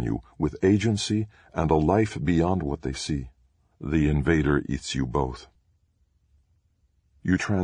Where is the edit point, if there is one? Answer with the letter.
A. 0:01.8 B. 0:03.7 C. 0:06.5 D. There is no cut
B